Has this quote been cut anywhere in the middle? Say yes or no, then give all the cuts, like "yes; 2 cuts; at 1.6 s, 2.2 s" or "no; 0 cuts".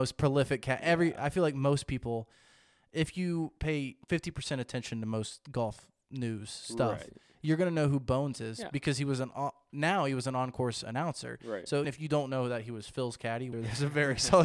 yes; 3 cuts; at 4.0 s, 11.8 s, 13.5 s